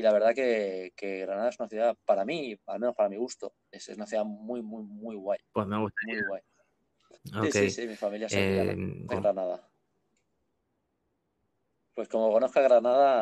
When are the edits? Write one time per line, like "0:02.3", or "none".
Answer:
0:07.1
0:09.1